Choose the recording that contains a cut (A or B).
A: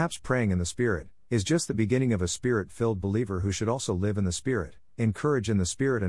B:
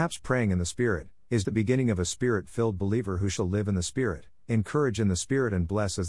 B